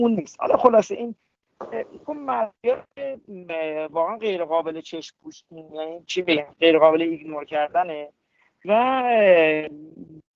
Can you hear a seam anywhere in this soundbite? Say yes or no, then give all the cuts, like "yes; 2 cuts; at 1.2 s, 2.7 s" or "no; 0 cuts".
no; 0 cuts